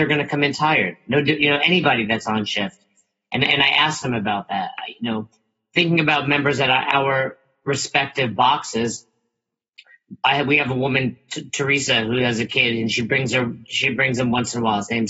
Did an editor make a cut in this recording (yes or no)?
no